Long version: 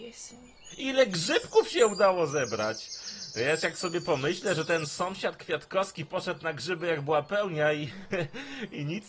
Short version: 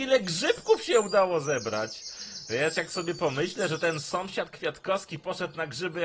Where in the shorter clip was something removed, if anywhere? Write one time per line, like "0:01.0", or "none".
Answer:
none